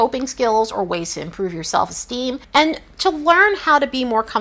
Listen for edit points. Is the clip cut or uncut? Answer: uncut